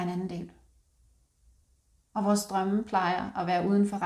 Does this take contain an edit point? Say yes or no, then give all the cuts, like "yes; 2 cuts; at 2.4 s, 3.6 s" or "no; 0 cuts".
yes; 1 cut; at 2.0 s